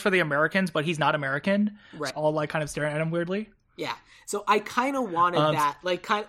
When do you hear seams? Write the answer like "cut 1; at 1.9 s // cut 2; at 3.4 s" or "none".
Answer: cut 1; at 2.1 s